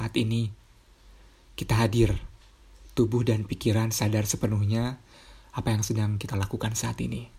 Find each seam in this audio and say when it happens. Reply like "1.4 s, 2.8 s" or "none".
none